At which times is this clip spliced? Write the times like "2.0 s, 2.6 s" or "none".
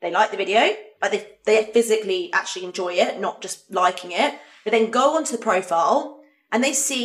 none

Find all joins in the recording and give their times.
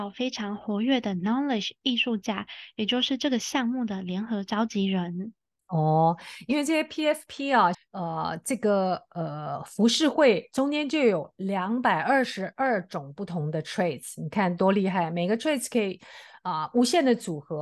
7.7 s

